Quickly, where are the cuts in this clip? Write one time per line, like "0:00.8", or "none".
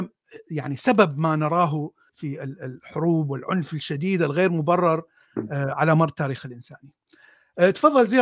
0:02.1